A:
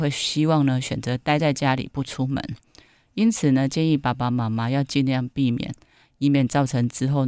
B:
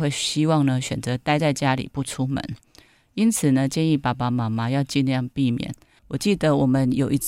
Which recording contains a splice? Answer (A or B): B